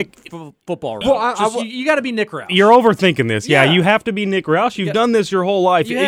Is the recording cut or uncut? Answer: uncut